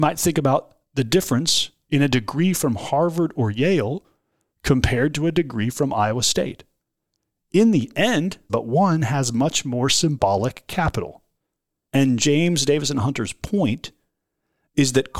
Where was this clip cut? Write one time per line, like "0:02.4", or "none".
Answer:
0:08.5
0:11.9